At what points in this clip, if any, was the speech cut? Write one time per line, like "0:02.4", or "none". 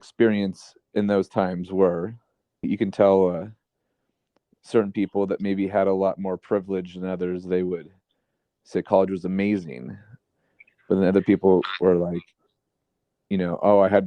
0:02.6